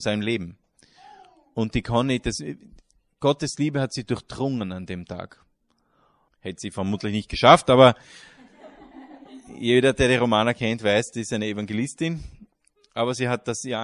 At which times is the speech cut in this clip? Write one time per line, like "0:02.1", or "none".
0:06.3